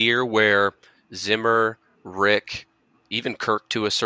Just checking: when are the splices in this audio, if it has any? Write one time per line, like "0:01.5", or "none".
none